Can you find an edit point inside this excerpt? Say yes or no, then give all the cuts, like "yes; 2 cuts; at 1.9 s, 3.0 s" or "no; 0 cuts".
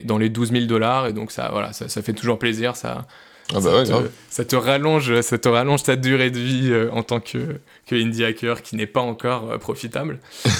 no; 0 cuts